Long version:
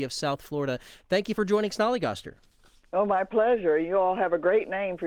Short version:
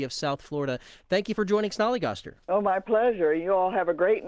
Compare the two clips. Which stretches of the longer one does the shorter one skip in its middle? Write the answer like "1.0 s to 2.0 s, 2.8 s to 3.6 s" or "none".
2.4 s to 2.9 s